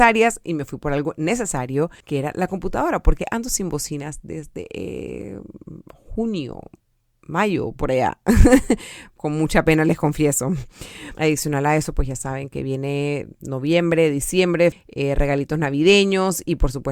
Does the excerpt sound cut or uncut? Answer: cut